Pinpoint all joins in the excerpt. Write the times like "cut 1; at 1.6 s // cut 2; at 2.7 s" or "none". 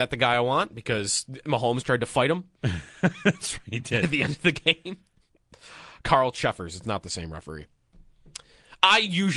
none